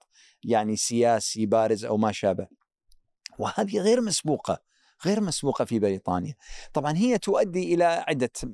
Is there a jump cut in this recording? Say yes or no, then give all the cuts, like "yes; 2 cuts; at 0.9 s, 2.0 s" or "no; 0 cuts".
no; 0 cuts